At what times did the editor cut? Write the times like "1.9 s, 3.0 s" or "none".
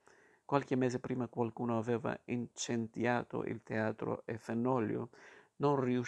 none